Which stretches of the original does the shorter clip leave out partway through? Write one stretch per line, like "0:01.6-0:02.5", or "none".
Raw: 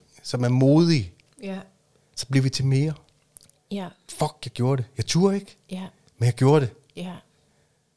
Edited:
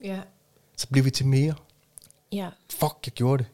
none